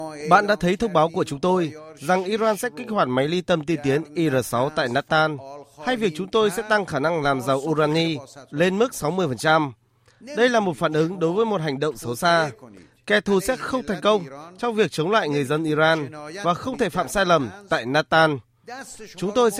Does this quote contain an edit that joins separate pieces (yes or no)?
no